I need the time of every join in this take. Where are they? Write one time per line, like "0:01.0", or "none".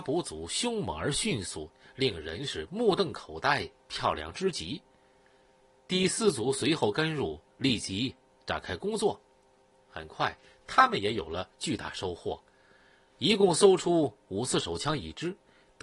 none